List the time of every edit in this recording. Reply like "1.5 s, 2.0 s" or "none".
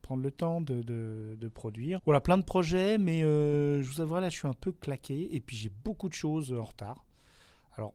2.0 s